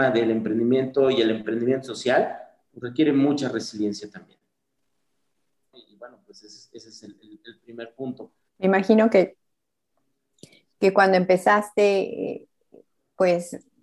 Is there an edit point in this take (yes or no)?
yes